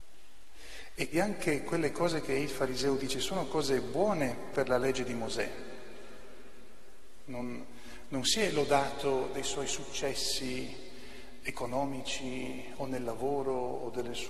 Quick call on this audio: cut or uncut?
cut